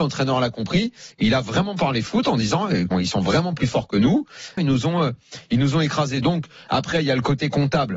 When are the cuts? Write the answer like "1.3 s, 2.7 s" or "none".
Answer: 1.1 s, 2.9 s, 4.6 s